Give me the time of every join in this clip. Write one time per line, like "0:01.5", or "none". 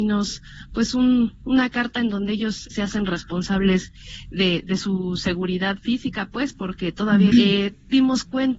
0:02.7
0:07.3